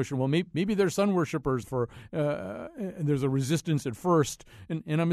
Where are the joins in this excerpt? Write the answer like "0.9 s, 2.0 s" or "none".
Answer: 1.6 s

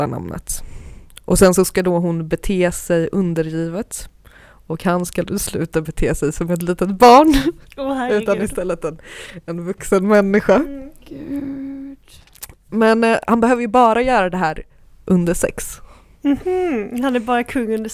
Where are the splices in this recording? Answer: none

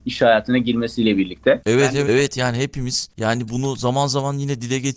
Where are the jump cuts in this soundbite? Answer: 2.0 s

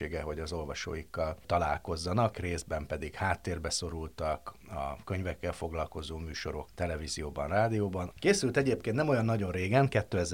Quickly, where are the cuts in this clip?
2.3 s, 6.7 s, 8.1 s

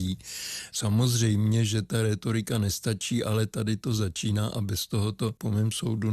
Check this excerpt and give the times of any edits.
none

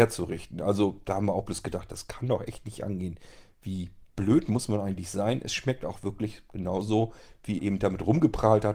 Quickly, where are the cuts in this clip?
7.6 s

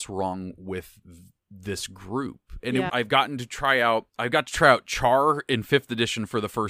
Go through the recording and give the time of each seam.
2.9 s, 4.1 s

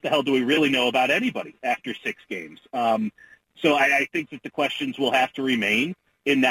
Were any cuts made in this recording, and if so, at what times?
none

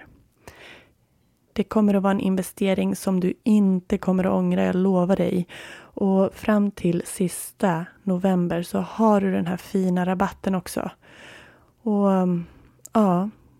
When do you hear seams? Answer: 1.4 s

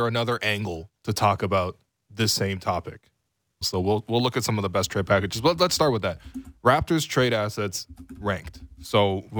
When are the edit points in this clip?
1.0 s, 3.6 s

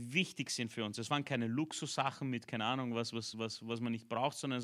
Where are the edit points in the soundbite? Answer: none

